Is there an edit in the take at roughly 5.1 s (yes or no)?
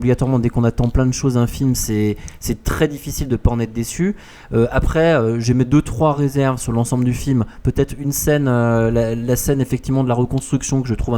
no